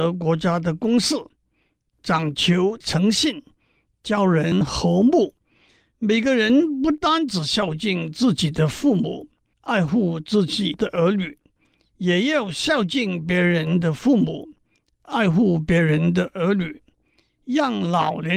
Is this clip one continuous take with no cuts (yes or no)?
yes